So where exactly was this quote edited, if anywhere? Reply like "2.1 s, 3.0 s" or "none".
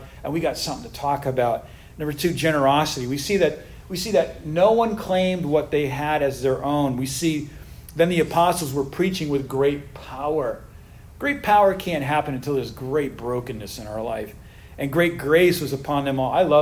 none